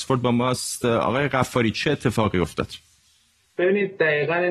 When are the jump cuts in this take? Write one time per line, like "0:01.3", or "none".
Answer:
none

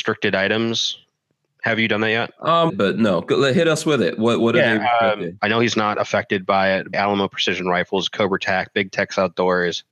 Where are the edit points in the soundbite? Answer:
0:02.7
0:05.4
0:06.9

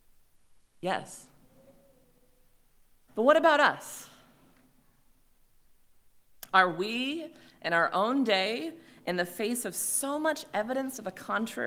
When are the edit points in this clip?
0:03.1

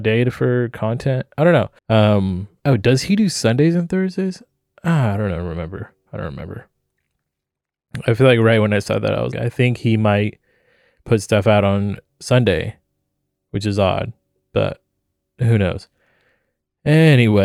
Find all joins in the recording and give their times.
0:01.8
0:09.3

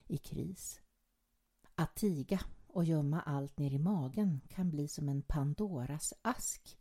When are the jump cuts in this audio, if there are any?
0:01.6

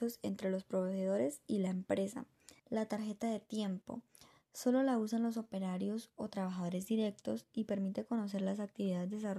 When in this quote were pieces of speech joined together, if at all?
0:02.6

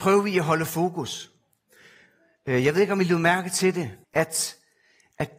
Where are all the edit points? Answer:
0:04.0

